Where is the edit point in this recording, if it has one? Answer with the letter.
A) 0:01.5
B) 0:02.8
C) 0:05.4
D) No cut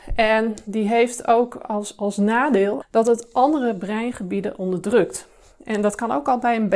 B